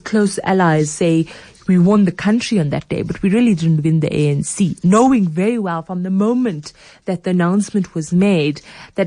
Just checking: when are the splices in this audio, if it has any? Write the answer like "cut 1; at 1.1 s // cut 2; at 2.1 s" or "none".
none